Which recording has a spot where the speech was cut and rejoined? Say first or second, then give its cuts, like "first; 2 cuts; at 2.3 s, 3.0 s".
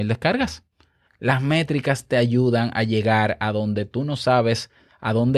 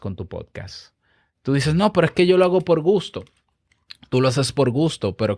first; 1 cut; at 1.1 s